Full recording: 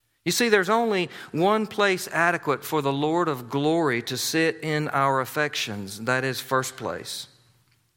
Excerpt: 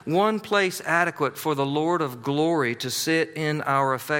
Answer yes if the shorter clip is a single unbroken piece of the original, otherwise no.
yes